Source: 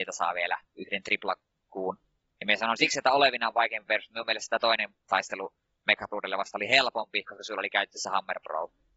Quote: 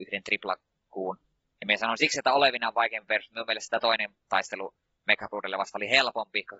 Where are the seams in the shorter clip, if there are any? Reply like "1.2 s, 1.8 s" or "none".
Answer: none